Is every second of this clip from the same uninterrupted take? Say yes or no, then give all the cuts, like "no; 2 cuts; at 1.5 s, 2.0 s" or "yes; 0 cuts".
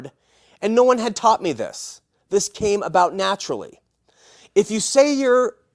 yes; 0 cuts